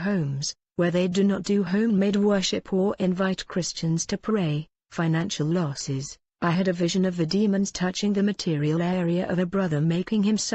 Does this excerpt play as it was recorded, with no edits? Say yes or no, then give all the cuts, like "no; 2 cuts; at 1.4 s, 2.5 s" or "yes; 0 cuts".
yes; 0 cuts